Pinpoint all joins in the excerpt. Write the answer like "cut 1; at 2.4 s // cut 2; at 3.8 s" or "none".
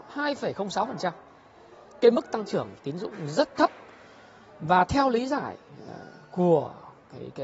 none

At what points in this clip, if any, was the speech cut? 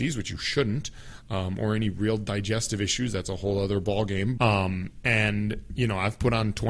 cut 1; at 4.4 s

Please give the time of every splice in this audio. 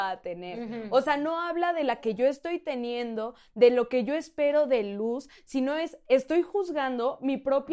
none

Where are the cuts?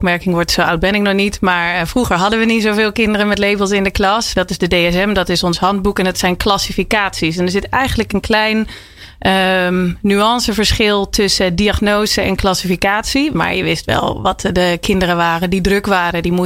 cut 1; at 4.3 s // cut 2; at 13.3 s

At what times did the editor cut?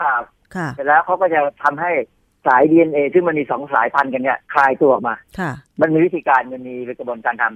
cut 1; at 4.4 s // cut 2; at 5.7 s

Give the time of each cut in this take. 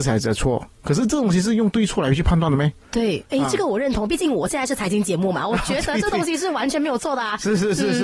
cut 1; at 2.8 s

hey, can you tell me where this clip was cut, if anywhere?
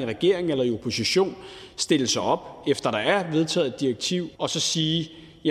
cut 1; at 4.3 s

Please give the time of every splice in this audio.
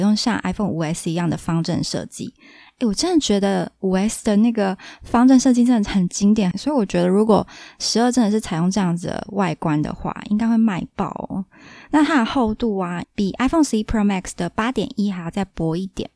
cut 1; at 6.5 s // cut 2; at 13.0 s

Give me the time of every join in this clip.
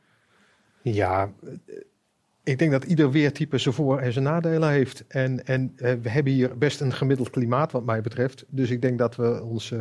none

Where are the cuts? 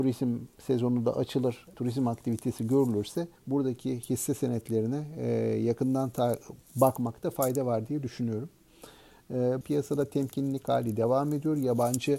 cut 1; at 1.7 s // cut 2; at 3.4 s // cut 3; at 9.6 s

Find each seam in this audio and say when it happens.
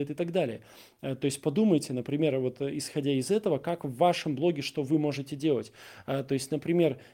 none

